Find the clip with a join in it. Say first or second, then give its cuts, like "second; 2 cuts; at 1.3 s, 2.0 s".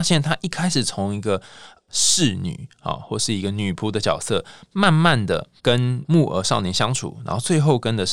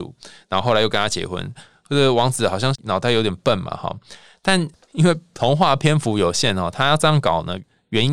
first; 1 cut; at 5.6 s